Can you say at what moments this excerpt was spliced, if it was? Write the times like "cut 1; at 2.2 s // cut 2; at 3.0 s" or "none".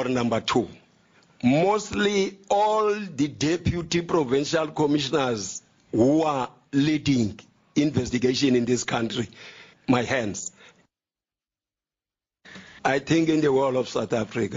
cut 1; at 9.7 s // cut 2; at 12.8 s

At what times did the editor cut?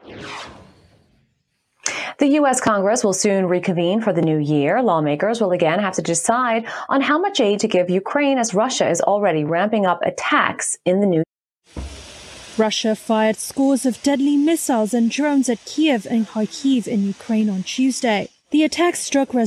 none

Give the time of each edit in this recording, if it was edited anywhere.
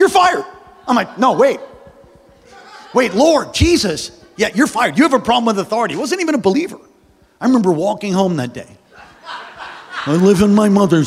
none

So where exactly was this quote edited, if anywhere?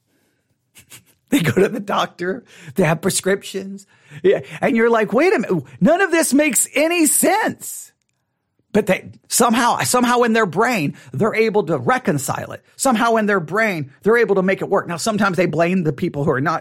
cut 1; at 9.2 s

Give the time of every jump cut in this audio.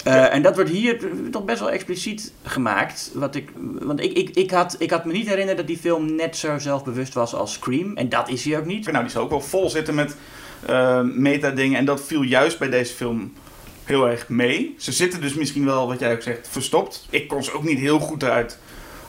cut 1; at 3.6 s // cut 2; at 8.9 s

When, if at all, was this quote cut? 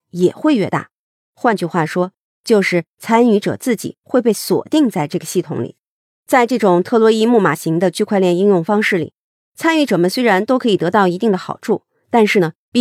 cut 1; at 6.1 s

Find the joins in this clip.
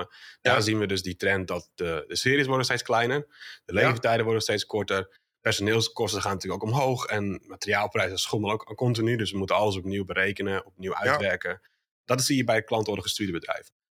none

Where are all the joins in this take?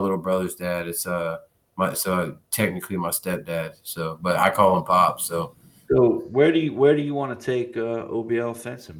cut 1; at 5.9 s

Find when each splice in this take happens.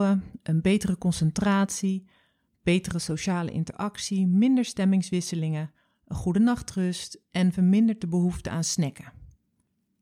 none

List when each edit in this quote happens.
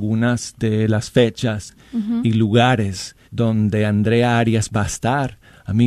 cut 1; at 3.2 s

